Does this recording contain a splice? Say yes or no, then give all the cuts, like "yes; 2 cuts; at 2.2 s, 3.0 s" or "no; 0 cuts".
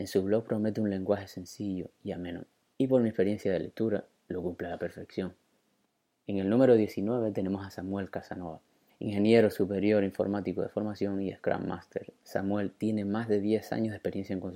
no; 0 cuts